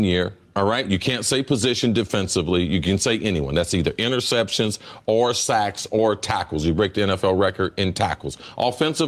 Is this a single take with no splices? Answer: yes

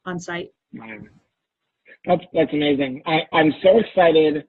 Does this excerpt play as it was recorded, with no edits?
yes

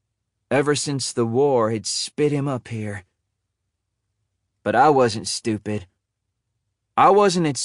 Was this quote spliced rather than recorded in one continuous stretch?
no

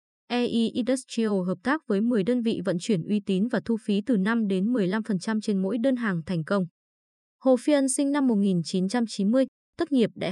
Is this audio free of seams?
yes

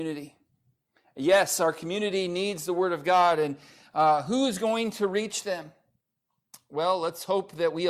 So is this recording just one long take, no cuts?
yes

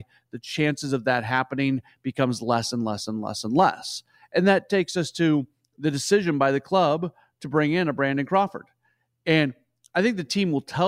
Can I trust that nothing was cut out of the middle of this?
yes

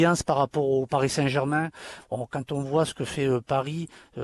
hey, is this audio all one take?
yes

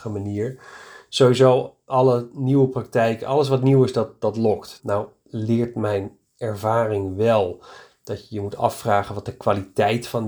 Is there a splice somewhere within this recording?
yes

